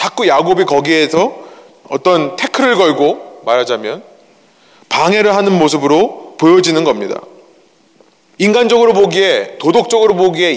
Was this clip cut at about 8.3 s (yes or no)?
no